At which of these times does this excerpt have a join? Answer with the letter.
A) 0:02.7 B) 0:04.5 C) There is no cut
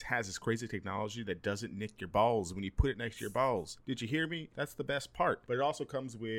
B